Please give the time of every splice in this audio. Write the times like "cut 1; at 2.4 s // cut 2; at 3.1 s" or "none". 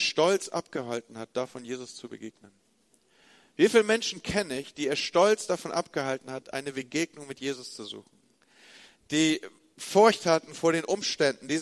none